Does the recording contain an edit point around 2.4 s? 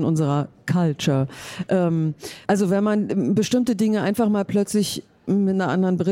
yes; 1 cut; at 2.4 s

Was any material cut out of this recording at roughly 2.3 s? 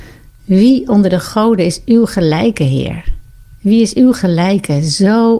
no; 1 cut; at 3.6 s

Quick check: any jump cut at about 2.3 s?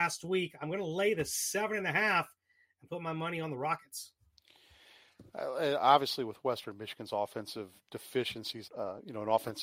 no; 1 cut; at 8.7 s

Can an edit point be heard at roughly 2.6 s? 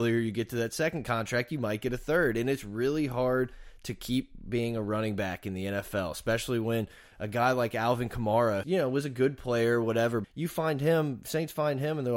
no; 2 cuts; at 8.6 s, 10.2 s

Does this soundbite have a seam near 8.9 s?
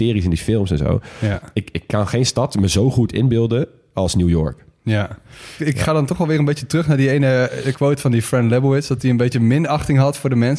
no; 1 cut; at 5.6 s

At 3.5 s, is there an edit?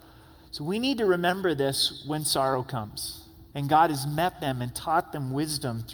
yes; 1 cut; at 3.5 s

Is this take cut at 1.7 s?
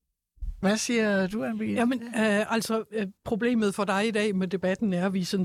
no; 1 cut; at 3.2 s

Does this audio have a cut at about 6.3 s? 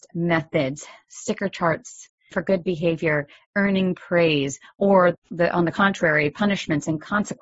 no; 1 cut; at 1.0 s

